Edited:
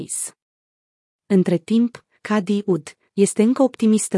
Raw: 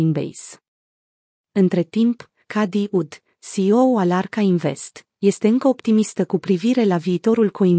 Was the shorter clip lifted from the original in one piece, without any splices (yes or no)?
no